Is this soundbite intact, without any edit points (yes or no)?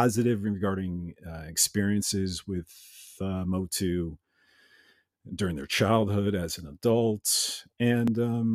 yes